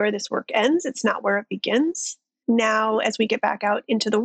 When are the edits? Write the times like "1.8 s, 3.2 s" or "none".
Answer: 2.4 s